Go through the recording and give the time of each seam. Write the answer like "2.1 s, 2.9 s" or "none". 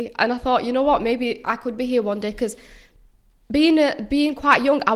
none